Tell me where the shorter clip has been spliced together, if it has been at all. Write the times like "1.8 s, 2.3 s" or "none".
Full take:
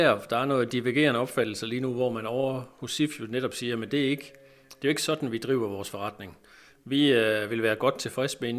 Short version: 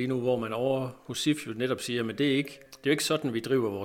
2.7 s